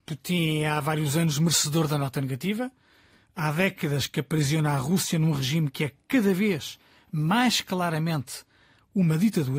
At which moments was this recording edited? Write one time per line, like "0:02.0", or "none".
none